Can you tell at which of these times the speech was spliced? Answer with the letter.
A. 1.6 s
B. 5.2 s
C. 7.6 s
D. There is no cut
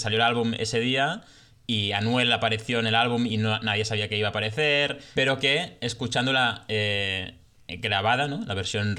B